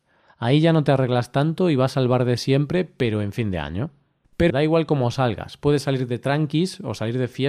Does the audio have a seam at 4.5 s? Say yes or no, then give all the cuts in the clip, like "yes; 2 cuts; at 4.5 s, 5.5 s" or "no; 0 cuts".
yes; 1 cut; at 4.5 s